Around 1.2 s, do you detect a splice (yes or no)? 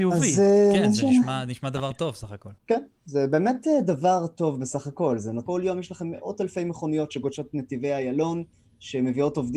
no